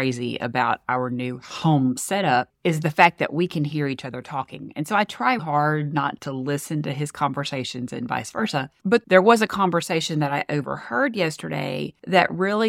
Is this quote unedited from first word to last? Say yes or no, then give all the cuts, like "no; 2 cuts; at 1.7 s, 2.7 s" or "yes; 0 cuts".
yes; 0 cuts